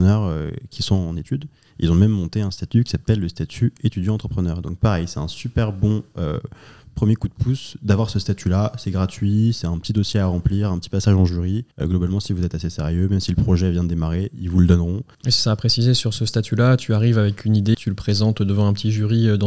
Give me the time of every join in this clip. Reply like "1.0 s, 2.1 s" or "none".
11.7 s, 15.1 s, 17.7 s

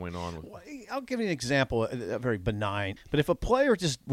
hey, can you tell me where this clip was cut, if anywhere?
3.0 s

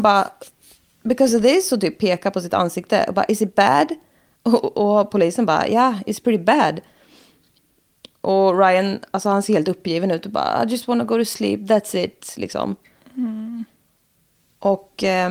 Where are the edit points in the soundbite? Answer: none

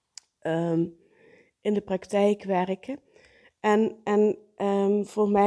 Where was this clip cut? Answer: none

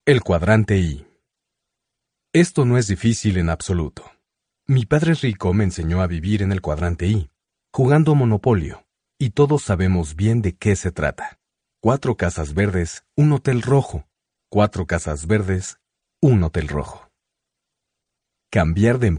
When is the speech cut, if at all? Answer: none

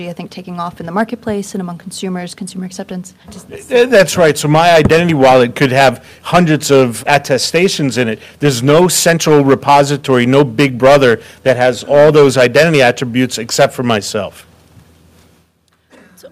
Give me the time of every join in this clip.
3.2 s, 7.0 s

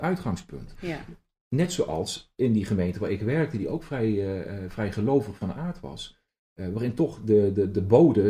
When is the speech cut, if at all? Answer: none

